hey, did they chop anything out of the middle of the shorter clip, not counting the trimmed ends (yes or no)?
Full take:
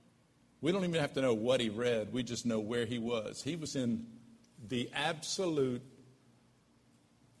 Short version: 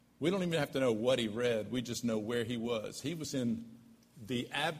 no